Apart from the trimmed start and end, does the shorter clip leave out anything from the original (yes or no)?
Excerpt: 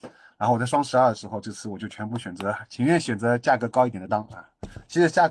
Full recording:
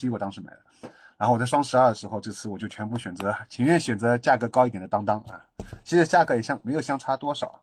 yes